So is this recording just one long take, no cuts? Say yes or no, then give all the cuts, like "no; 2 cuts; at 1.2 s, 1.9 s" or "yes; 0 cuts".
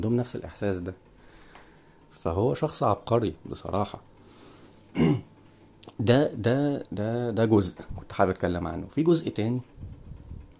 yes; 0 cuts